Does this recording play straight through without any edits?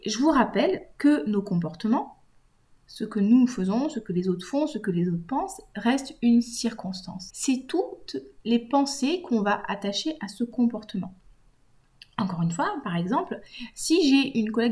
no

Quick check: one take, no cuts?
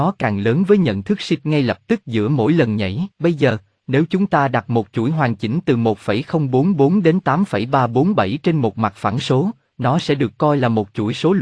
no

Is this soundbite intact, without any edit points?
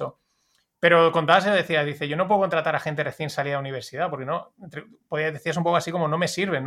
yes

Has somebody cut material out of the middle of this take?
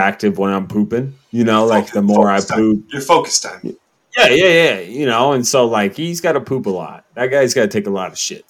no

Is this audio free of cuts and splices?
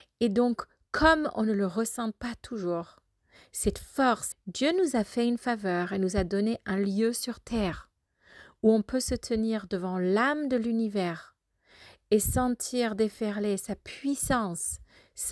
no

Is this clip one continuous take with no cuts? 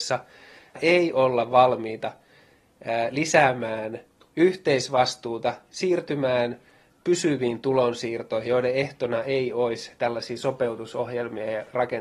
no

